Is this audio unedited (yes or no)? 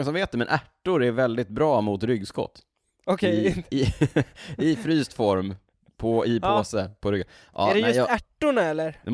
yes